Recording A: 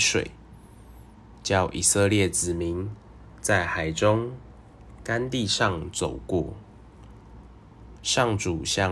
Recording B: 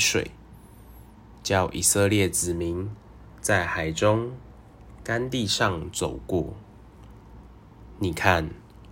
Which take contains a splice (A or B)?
A